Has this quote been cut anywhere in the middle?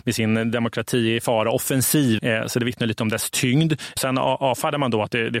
yes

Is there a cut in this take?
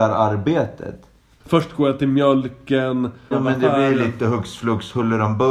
yes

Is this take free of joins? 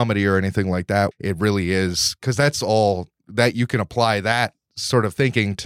no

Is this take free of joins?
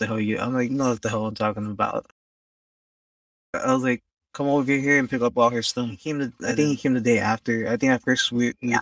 yes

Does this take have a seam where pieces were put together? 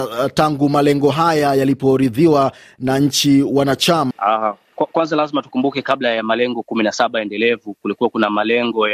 yes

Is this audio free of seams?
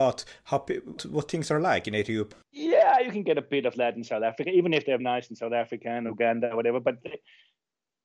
no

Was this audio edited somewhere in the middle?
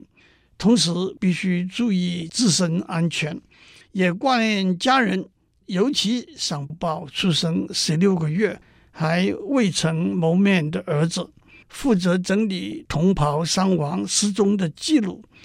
yes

